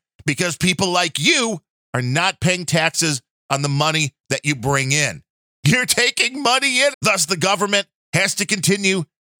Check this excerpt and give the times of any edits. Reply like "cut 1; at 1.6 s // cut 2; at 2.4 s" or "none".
cut 1; at 5.5 s // cut 2; at 6.9 s